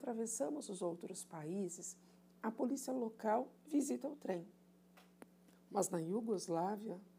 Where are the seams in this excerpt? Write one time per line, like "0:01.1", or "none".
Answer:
none